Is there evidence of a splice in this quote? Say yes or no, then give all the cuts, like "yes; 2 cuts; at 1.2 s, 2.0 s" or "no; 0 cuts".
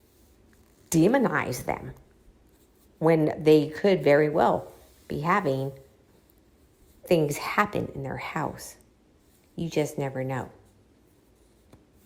no; 0 cuts